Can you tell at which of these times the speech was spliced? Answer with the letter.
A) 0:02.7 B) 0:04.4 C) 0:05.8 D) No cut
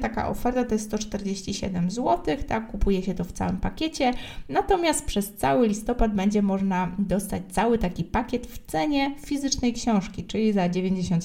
D